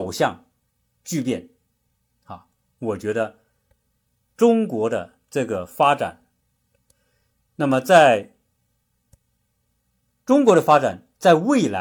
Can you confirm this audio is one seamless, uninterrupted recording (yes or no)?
yes